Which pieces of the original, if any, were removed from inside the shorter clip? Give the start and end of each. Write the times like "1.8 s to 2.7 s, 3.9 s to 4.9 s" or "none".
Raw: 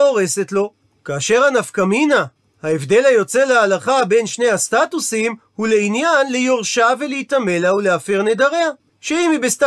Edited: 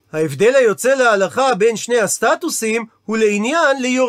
none